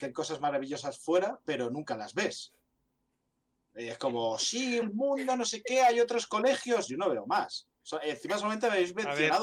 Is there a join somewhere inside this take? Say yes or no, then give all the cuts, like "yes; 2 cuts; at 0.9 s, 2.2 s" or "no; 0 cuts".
yes; 1 cut; at 4.8 s